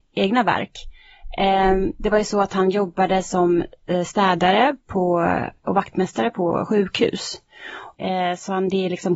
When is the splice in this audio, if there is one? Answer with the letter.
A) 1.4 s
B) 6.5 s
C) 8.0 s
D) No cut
C